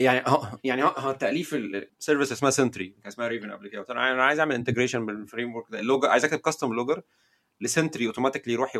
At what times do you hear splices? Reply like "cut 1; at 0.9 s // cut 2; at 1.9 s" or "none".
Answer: cut 1; at 1.9 s